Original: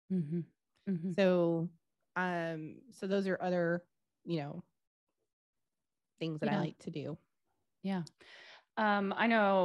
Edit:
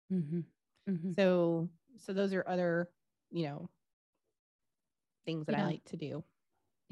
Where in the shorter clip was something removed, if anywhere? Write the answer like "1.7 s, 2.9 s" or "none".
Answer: 1.9 s